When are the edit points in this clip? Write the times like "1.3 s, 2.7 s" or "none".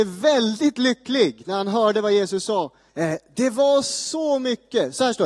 2.9 s